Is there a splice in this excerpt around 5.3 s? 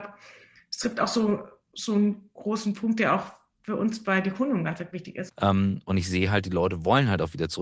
yes; 1 cut; at 5.3 s

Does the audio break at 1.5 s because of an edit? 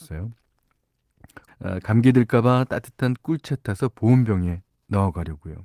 yes; 1 cut; at 1.5 s

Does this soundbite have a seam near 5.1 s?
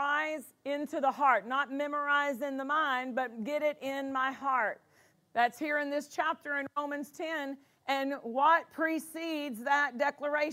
yes; 1 cut; at 5.1 s

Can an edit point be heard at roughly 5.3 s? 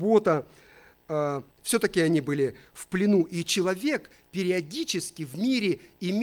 no; 1 cut; at 1.5 s

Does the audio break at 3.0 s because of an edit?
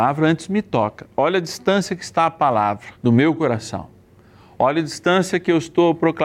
yes; 1 cut; at 3.0 s

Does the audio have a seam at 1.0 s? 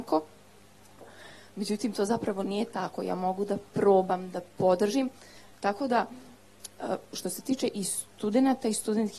yes; 1 cut; at 1.0 s

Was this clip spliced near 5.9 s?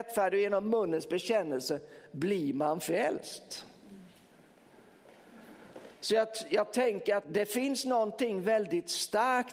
no; 1 cut; at 7.2 s

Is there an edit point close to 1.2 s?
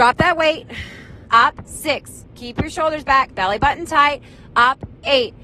yes; 2 cuts; at 1.2 s, 3.3 s

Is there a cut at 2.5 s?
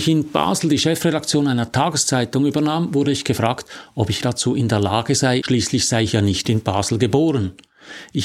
no; 2 cuts; at 4.2 s, 5.4 s

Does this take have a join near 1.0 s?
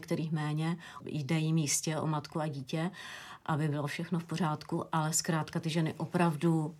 yes; 1 cut; at 1.0 s

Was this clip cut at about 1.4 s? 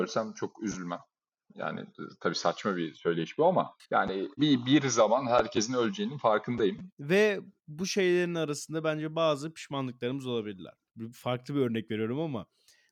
no; 3 cuts; at 4.4 s, 6.9 s, 10.9 s

